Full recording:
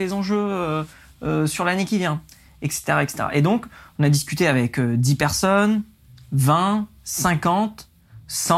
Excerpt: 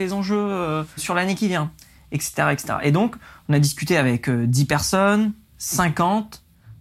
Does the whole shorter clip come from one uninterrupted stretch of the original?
no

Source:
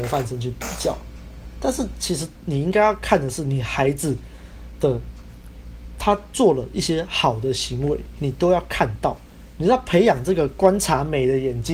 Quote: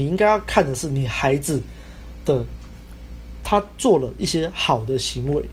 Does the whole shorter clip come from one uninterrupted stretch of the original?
yes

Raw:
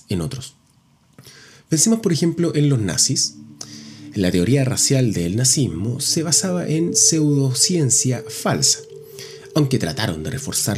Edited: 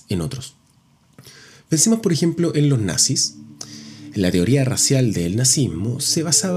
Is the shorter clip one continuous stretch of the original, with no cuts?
yes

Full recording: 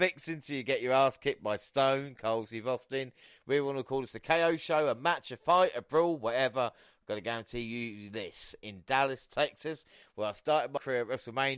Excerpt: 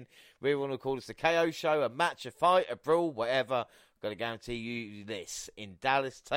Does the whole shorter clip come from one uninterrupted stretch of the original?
yes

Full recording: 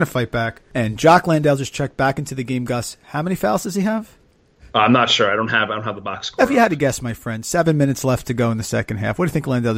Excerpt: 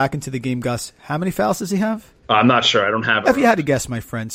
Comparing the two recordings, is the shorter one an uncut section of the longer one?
no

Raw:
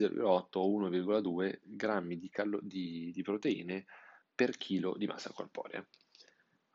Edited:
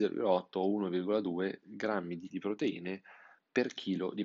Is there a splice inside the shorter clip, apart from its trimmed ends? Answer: yes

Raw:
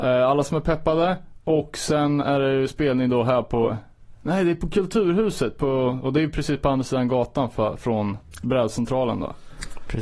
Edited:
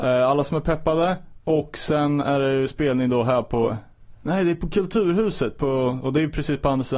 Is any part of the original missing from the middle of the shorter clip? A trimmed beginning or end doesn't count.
no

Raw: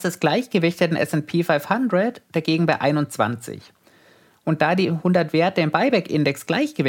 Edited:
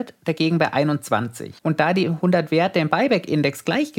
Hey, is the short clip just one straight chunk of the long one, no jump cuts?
no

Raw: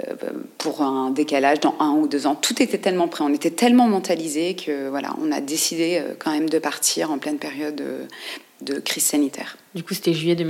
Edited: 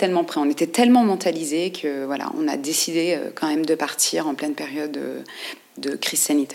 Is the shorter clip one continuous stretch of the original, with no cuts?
yes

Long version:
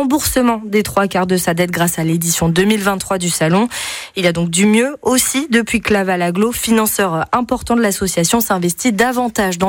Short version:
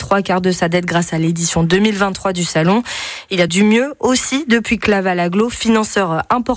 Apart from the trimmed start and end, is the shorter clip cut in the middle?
yes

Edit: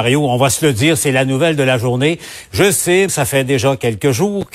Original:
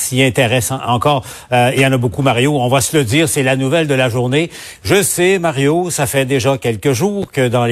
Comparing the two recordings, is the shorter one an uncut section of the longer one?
no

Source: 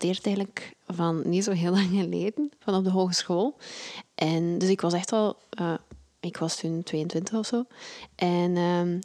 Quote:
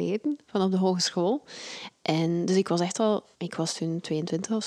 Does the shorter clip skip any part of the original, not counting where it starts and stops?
yes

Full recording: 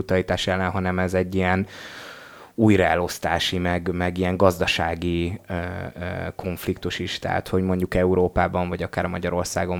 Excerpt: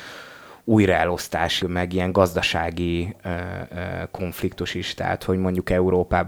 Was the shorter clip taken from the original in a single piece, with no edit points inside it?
no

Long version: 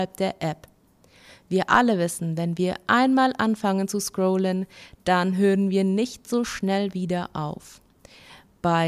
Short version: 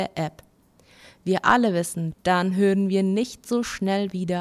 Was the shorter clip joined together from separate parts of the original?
yes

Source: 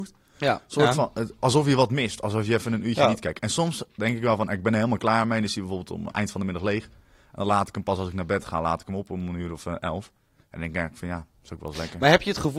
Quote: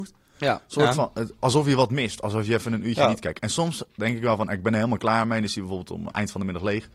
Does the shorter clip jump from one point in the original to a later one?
no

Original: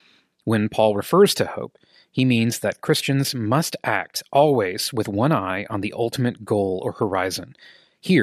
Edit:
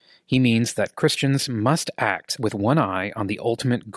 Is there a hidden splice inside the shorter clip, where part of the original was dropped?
yes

